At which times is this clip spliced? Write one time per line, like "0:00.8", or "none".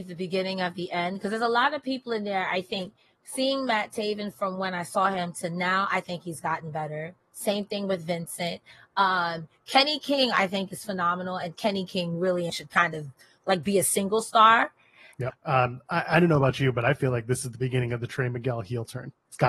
0:12.5
0:15.3